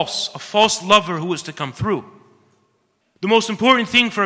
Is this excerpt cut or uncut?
cut